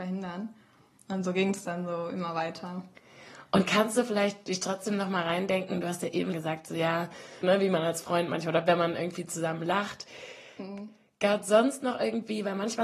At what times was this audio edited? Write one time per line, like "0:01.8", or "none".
0:06.3
0:07.4

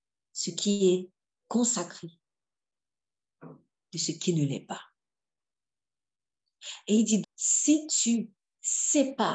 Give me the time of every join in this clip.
0:07.2

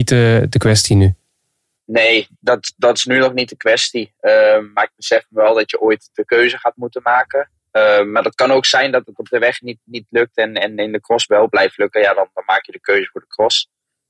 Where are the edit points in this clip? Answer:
none

